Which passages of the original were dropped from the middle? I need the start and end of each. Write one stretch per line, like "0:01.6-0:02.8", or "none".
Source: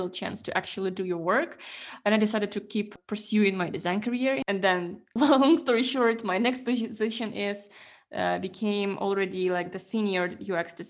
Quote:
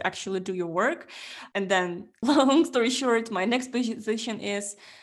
0:02.0-0:04.4